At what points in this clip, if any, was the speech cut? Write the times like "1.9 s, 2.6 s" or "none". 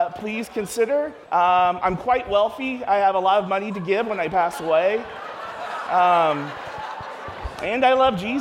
1.2 s